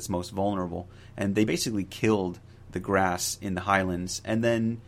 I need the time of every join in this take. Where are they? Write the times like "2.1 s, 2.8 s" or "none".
none